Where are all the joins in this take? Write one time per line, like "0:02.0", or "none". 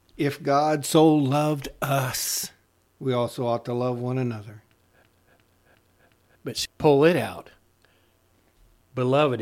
0:06.7